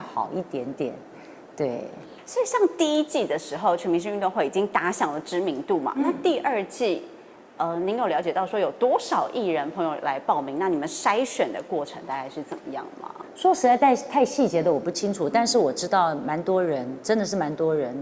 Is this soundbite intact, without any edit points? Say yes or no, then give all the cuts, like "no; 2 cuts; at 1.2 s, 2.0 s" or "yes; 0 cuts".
yes; 0 cuts